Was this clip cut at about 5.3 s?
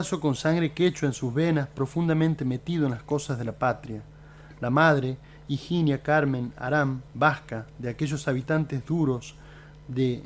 no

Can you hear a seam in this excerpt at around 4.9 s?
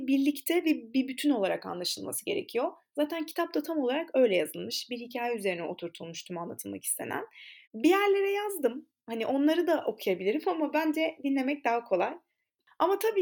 no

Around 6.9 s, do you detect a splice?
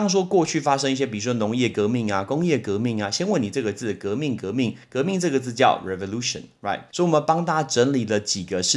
yes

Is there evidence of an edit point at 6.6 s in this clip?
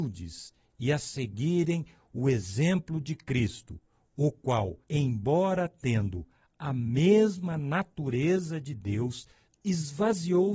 no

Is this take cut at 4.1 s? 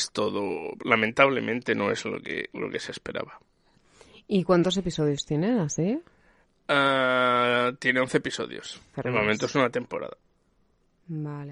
no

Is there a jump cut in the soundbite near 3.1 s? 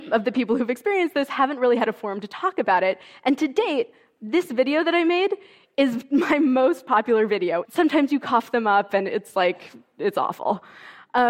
no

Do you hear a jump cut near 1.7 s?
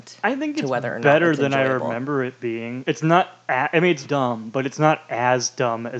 no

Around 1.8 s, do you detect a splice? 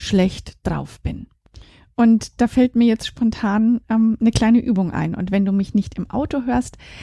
no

